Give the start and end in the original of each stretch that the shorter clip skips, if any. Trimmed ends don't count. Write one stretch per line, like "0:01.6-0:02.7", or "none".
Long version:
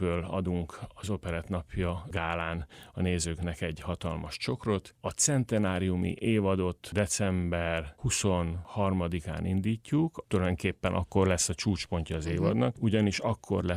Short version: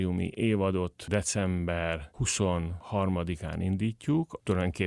none